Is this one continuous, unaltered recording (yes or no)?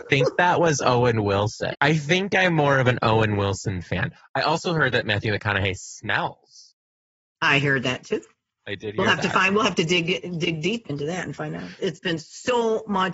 no